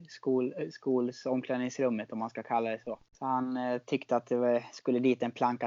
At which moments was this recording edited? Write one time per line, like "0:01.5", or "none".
0:03.1